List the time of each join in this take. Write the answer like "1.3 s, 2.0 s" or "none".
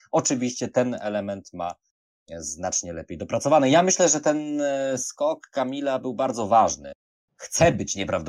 7.3 s